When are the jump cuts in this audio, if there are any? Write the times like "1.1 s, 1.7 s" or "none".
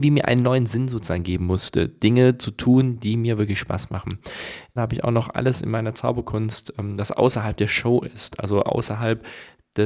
4.8 s